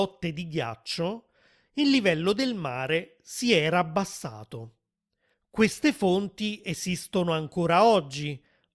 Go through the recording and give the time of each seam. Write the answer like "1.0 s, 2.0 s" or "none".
5.3 s